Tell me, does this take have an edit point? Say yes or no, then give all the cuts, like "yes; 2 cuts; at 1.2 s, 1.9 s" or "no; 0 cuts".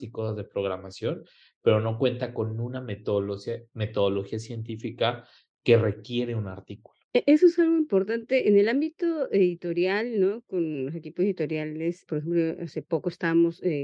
yes; 2 cuts; at 7.0 s, 12.1 s